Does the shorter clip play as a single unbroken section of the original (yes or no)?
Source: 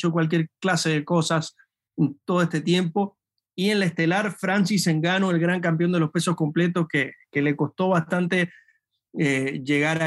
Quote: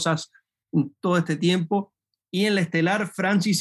yes